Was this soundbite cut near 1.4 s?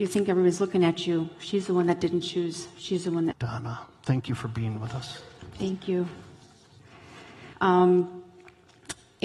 no; 2 cuts; at 3.3 s, 7.5 s

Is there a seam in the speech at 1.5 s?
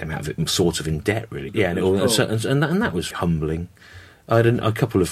yes; 2 cuts; at 1.5 s, 3.1 s

